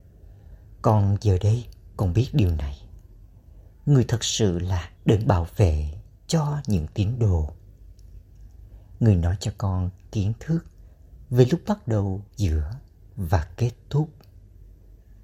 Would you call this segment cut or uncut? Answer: cut